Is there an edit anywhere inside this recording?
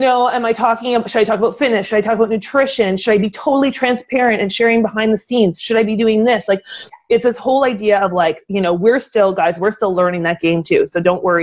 no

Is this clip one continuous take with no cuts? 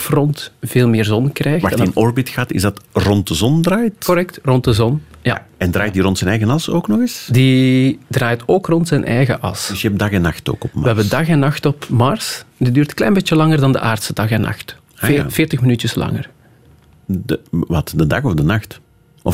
yes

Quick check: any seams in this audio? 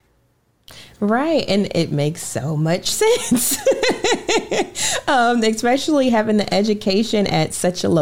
no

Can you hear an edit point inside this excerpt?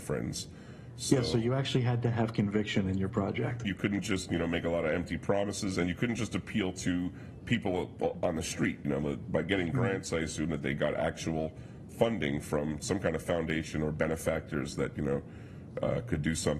yes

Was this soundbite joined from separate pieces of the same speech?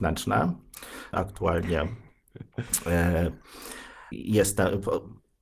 yes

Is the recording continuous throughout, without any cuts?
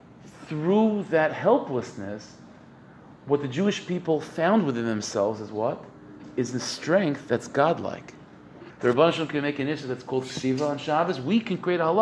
no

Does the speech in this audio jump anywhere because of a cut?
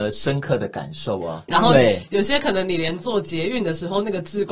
yes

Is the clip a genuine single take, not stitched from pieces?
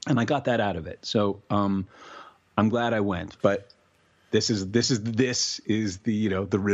no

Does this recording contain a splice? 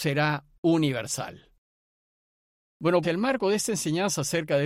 yes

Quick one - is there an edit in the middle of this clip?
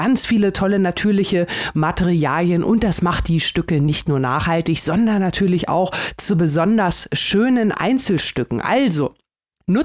no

